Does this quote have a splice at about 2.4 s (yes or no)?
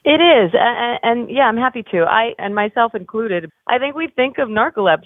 yes